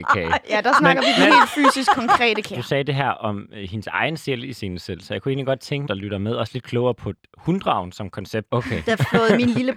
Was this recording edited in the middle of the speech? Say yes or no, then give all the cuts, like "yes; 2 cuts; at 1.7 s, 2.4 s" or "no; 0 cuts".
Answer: yes; 3 cuts; at 2.5 s, 5.9 s, 8.5 s